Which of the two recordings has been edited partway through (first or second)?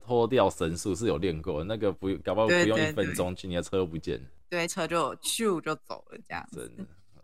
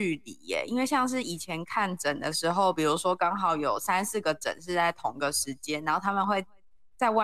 first